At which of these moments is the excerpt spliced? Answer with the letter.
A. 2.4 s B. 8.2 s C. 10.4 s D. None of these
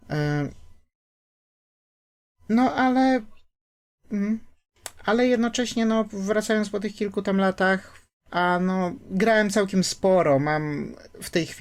D